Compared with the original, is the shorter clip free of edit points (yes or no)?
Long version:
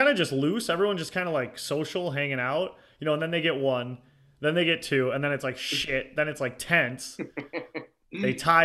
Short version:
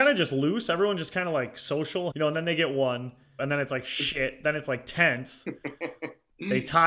no